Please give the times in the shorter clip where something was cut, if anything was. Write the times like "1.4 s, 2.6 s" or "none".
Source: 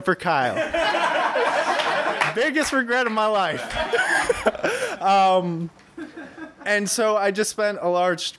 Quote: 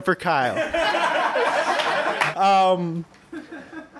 2.3 s